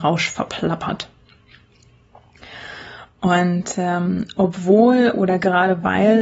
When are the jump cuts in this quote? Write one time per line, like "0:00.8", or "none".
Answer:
0:03.1